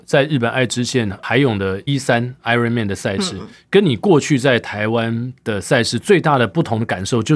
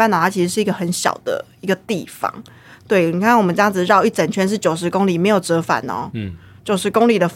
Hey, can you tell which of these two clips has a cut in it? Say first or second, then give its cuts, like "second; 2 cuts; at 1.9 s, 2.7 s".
first; 1 cut; at 1.9 s